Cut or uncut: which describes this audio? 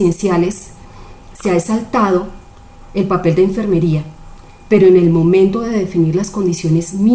uncut